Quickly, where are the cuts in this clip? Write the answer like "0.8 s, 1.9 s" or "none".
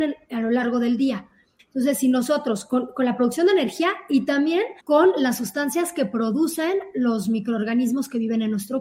1.6 s, 4.8 s